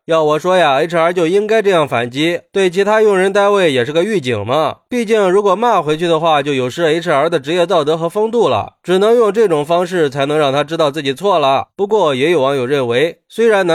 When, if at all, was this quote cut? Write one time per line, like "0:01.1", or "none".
none